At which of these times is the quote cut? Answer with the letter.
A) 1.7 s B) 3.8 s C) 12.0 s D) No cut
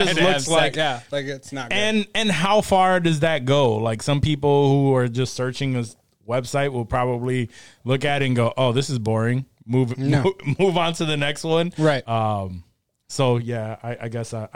C